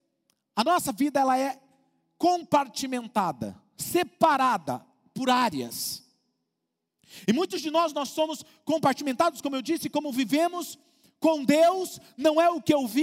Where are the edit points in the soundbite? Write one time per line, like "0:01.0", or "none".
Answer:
none